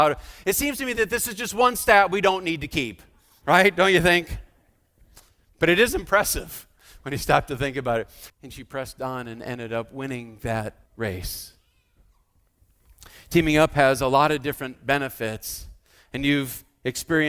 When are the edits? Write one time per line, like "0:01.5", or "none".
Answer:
0:08.3
0:10.9